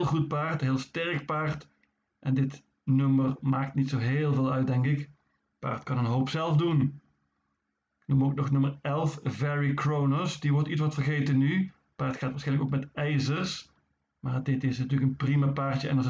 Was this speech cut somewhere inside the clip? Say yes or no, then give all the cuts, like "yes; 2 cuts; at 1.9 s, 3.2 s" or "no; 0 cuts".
no; 0 cuts